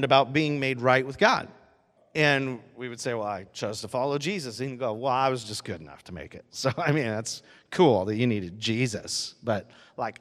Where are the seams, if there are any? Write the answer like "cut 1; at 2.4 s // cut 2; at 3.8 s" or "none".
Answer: cut 1; at 2.0 s